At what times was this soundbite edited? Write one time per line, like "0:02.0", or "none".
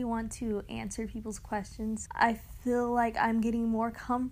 0:02.1